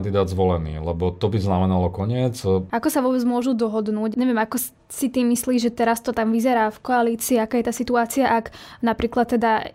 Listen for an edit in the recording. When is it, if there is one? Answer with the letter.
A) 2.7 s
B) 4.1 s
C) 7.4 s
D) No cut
A